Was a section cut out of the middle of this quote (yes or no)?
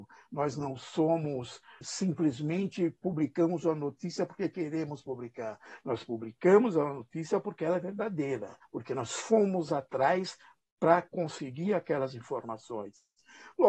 yes